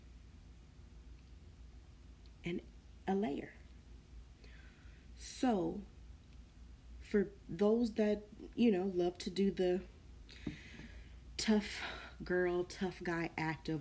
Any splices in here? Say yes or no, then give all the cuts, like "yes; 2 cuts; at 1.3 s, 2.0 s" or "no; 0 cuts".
no; 0 cuts